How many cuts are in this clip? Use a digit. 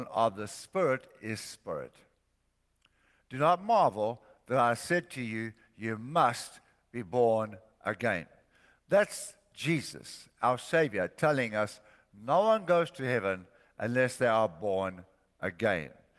0